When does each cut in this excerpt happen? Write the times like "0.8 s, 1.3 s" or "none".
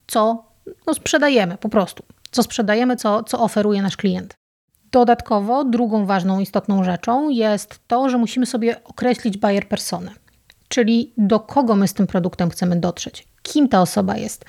none